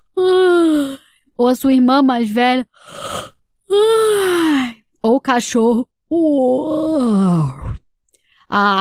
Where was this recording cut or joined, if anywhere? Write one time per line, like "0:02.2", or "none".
none